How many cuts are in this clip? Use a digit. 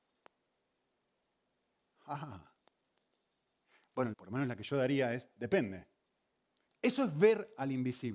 2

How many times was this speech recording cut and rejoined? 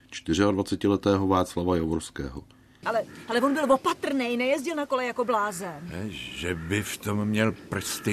1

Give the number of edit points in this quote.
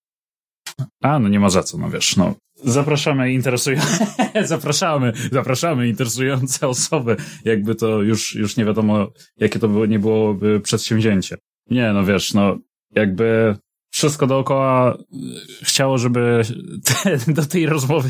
1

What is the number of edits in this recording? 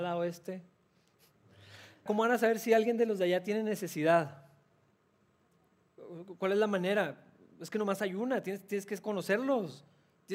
1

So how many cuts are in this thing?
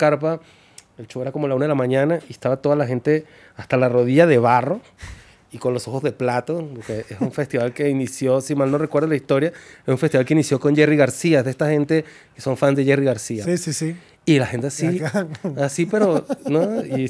1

